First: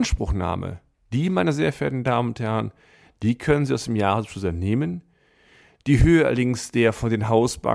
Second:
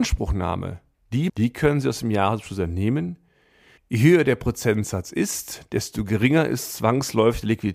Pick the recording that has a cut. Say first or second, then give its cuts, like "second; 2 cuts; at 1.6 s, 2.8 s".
second; 2 cuts; at 1.3 s, 3.8 s